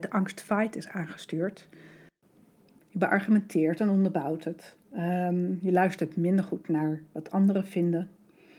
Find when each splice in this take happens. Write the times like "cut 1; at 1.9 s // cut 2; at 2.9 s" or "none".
cut 1; at 2.8 s // cut 2; at 4.8 s